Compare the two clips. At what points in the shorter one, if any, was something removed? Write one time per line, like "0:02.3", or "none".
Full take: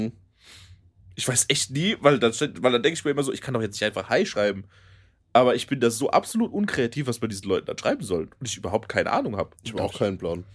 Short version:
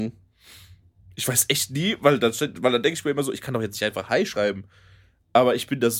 none